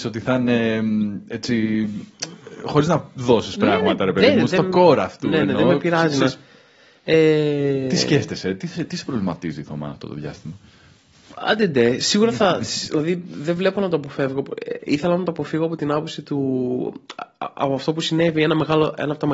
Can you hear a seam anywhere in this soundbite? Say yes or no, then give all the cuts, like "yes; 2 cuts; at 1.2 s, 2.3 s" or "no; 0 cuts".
no; 0 cuts